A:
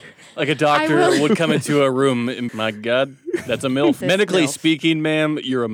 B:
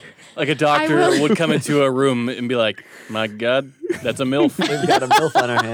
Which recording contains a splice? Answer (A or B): A